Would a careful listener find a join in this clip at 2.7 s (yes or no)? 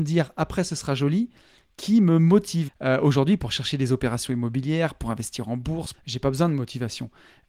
yes